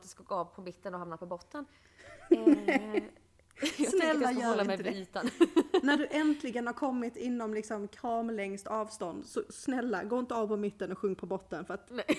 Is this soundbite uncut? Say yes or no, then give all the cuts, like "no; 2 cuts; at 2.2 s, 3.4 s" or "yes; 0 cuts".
yes; 0 cuts